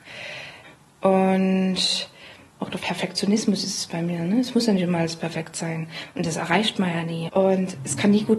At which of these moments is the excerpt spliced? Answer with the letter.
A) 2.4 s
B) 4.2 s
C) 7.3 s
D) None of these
C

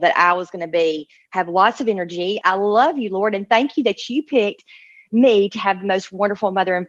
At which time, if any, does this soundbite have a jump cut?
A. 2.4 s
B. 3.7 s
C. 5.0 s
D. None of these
A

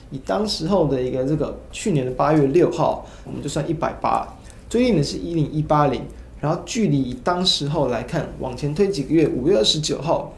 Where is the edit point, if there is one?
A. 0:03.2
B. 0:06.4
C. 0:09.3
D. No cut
A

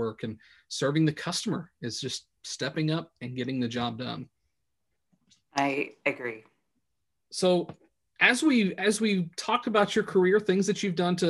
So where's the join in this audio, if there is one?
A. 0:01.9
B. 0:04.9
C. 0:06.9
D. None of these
D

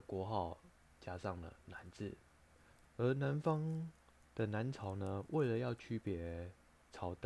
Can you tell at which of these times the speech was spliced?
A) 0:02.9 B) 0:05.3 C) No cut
A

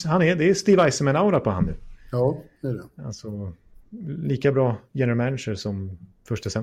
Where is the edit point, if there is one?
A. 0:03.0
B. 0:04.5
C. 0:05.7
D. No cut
D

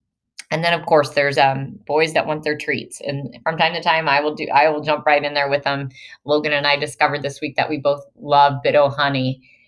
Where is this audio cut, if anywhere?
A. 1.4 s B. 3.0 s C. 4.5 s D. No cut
A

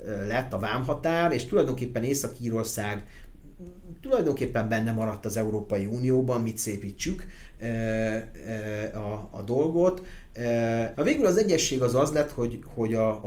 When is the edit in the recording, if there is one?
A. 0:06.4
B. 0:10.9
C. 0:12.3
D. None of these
B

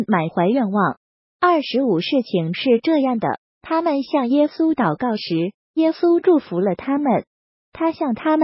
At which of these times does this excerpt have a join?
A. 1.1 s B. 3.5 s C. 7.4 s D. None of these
D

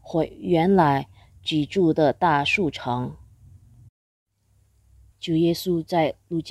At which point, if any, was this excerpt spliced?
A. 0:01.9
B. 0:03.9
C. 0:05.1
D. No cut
C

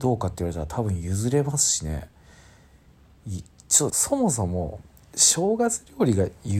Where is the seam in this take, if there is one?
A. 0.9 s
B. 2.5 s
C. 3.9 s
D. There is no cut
C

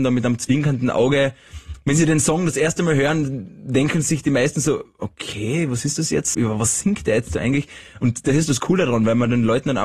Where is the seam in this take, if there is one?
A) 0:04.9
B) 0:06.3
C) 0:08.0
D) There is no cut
B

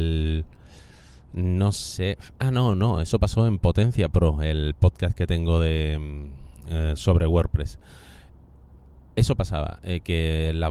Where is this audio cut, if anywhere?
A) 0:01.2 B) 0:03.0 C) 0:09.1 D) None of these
D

